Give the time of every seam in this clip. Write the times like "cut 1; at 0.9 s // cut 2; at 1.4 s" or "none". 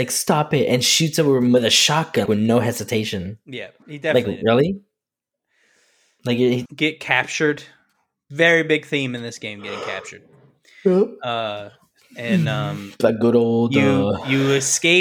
cut 1; at 2.3 s // cut 2; at 6.7 s